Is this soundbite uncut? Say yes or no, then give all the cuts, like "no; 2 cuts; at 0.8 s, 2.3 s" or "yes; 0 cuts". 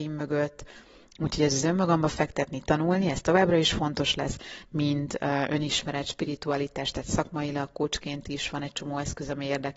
no; 1 cut; at 1.1 s